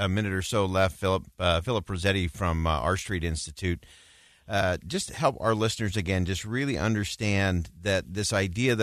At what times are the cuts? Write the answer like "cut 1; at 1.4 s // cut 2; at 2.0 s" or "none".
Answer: none